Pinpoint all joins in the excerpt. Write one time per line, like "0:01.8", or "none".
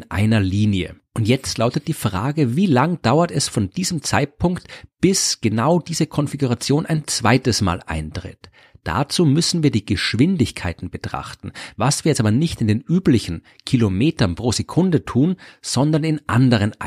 none

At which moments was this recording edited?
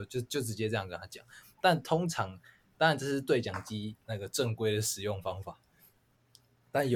none

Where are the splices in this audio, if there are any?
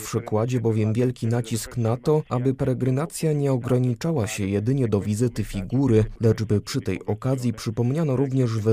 none

